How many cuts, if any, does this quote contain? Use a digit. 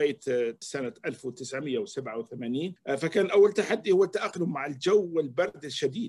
1